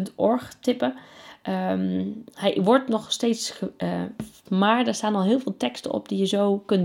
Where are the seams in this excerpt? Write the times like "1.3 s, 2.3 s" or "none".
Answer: 4.5 s